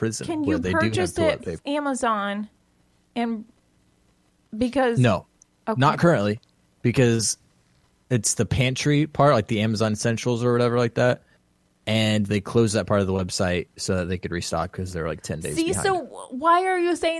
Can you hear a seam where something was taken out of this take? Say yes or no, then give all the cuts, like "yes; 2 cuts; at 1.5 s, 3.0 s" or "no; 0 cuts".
yes; 1 cut; at 1.6 s